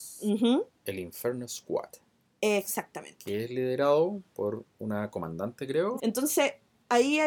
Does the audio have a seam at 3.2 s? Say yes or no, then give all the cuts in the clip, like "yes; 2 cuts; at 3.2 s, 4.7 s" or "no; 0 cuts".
no; 1 cut; at 6.0 s